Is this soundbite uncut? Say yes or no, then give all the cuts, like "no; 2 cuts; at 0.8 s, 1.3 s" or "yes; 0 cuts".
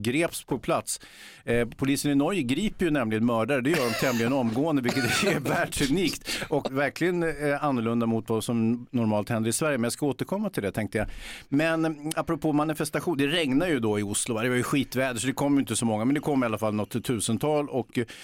no; 1 cut; at 6.7 s